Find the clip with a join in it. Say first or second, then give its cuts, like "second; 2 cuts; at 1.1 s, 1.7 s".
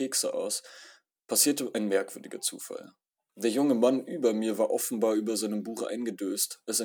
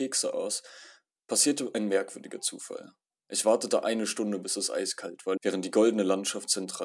second; 2 cuts; at 3.1 s, 5.4 s